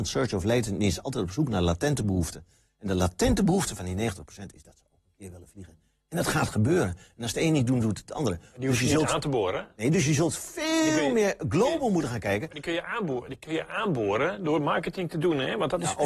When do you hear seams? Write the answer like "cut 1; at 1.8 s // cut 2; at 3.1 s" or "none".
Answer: none